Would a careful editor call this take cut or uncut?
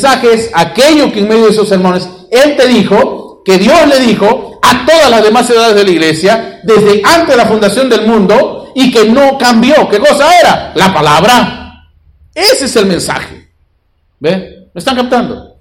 uncut